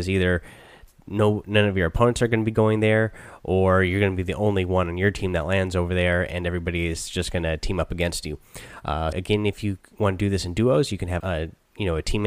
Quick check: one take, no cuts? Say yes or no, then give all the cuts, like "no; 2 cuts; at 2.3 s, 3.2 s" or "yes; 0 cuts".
no; 2 cuts; at 9.1 s, 11.2 s